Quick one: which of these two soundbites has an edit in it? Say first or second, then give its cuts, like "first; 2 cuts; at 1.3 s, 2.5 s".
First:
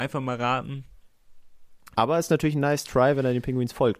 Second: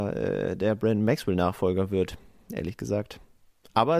first; 1 cut; at 1.9 s